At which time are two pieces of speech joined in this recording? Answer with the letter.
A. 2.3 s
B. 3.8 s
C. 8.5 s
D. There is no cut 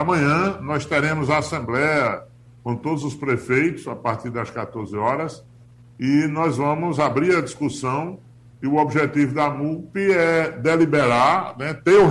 D